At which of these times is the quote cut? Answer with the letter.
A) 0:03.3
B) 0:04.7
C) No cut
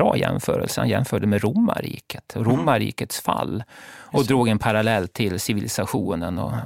C